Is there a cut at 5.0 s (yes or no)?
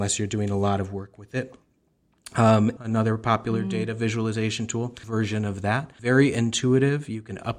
yes